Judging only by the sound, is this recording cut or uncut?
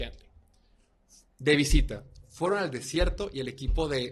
uncut